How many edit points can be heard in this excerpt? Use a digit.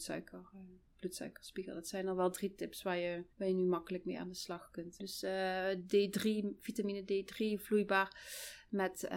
2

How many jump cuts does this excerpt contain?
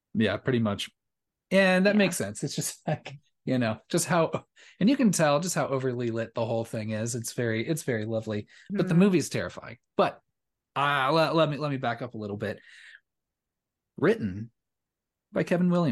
1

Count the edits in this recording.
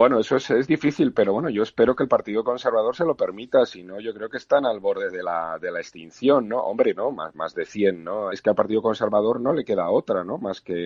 2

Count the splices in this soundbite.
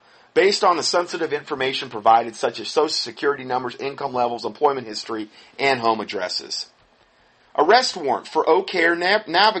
1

